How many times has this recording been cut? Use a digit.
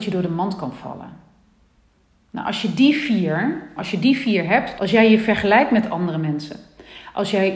2